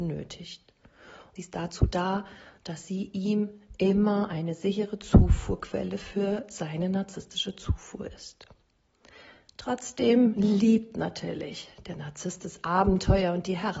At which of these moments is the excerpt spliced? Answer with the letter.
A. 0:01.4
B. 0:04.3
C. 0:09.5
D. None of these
A